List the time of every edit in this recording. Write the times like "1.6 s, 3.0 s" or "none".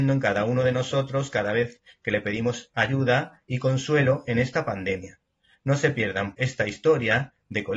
6.3 s